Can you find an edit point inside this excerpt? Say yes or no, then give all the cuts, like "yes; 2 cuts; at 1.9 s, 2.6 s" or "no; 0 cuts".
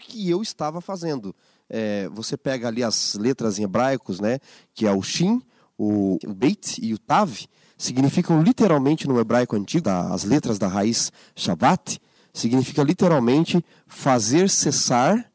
yes; 2 cuts; at 6.2 s, 9.8 s